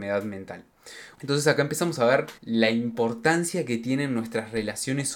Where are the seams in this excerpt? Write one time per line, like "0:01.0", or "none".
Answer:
0:01.1
0:02.4